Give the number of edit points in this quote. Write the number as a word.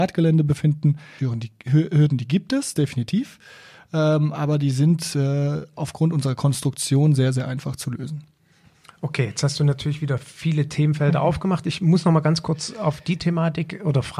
one